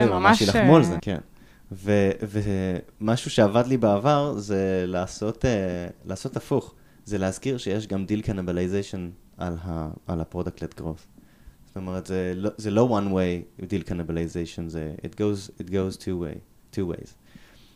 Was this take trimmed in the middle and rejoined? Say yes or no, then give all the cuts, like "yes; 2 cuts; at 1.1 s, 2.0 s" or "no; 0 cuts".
yes; 1 cut; at 1.0 s